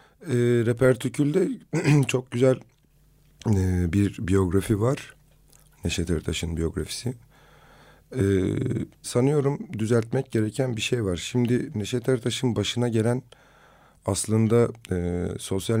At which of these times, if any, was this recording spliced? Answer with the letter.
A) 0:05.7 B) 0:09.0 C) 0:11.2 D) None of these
B